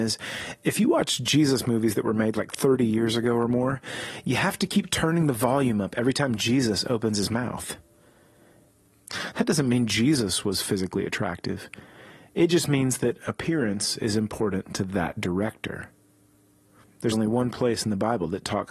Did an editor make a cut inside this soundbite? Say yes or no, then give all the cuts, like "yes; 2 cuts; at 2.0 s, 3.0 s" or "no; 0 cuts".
yes; 2 cuts; at 8.7 s, 17.1 s